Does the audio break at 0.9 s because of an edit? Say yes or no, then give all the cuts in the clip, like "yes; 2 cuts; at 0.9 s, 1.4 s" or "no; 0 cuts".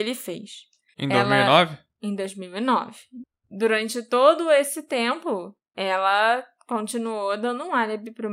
yes; 1 cut; at 0.9 s